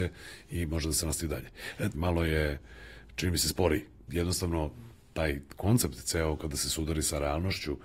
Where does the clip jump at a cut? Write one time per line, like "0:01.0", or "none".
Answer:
0:01.9
0:04.1